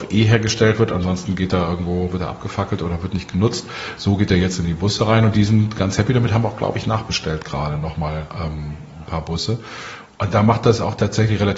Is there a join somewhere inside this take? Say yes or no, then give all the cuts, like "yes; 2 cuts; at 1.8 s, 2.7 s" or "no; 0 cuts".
no; 0 cuts